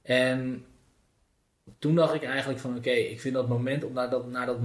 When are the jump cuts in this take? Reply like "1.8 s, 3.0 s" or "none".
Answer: none